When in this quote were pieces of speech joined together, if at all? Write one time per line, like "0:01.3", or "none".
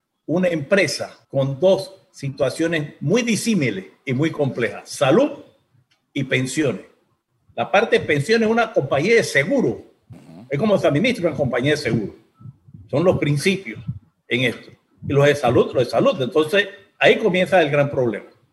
0:01.2